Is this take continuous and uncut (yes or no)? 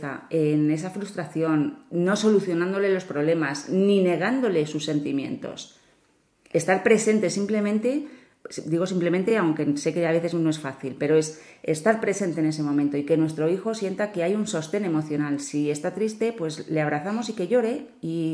yes